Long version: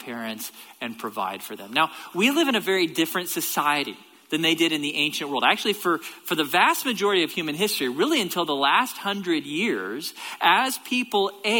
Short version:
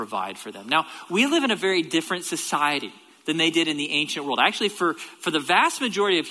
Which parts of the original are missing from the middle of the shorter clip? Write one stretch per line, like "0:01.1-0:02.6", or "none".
none